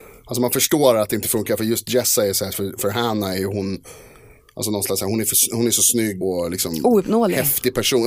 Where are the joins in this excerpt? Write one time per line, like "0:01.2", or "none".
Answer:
0:06.2

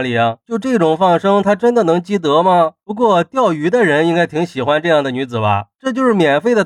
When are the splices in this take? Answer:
none

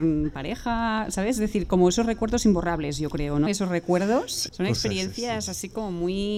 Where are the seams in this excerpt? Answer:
0:03.5
0:04.5

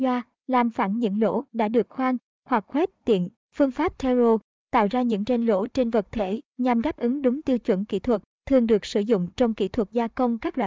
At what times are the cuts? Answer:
0:08.3

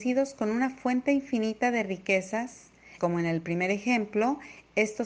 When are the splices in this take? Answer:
0:03.0

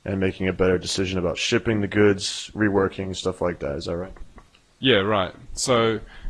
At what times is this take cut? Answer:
none

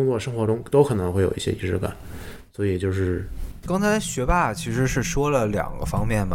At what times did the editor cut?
0:03.6

